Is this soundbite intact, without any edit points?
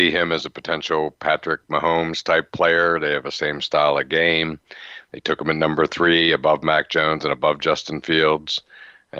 yes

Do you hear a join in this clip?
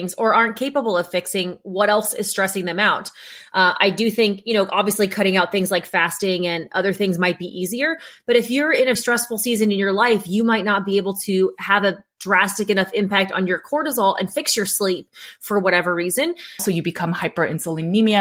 yes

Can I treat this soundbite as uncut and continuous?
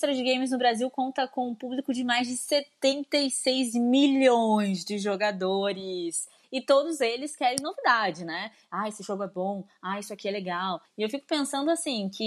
no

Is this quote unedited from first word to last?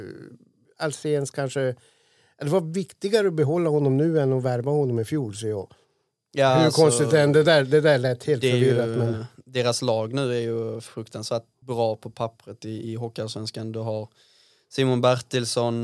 no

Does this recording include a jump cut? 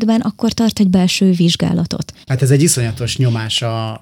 yes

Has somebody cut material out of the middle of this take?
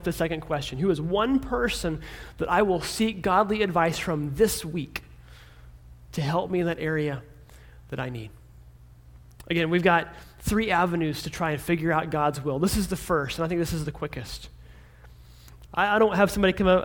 yes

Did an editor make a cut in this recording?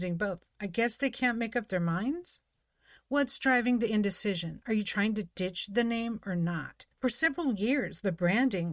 yes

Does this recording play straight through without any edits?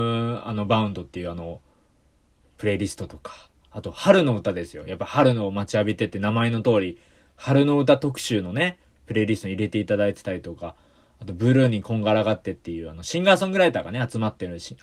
yes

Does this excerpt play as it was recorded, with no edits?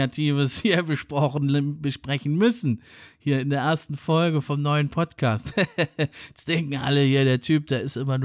yes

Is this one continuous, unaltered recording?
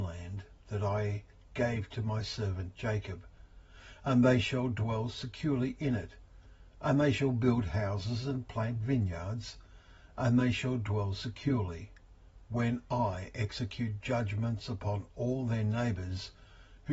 yes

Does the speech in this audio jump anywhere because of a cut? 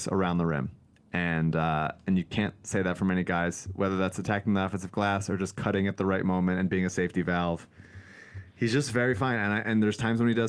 no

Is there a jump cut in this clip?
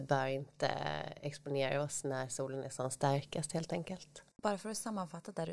yes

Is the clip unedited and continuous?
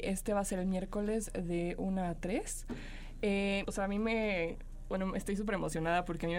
no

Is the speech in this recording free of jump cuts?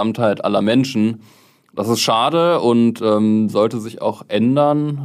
yes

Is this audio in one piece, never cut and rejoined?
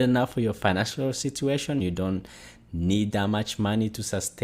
no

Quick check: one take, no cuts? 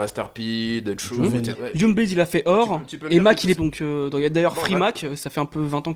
no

